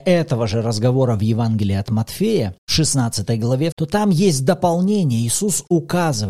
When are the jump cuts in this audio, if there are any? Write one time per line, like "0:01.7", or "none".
0:03.7